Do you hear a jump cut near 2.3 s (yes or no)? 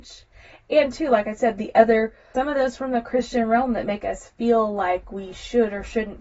yes